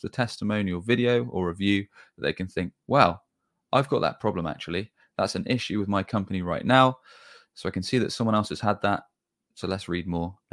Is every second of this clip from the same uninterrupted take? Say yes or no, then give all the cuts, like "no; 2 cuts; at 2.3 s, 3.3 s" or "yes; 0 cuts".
yes; 0 cuts